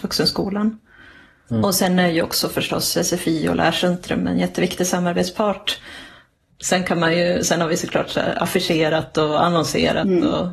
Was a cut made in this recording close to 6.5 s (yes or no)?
yes